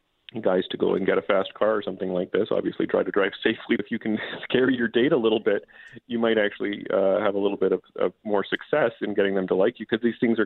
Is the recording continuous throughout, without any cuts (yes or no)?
no